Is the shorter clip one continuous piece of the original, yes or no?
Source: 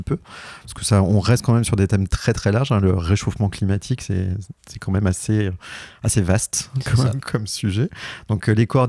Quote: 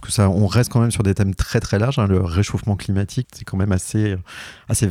no